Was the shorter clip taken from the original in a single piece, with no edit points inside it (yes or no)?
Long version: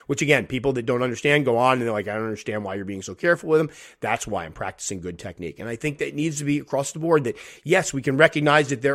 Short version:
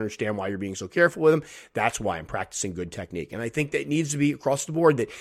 yes